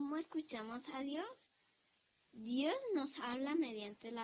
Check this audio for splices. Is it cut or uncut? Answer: uncut